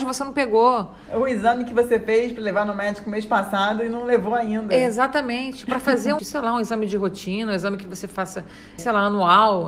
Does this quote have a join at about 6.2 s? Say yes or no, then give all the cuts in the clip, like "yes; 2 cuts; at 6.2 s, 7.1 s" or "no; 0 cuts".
yes; 2 cuts; at 6.2 s, 8.8 s